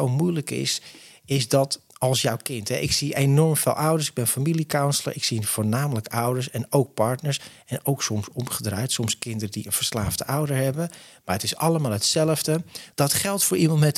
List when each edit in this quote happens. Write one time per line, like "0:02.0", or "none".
0:12.9